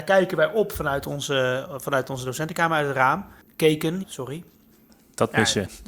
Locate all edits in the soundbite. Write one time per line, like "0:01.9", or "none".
0:04.0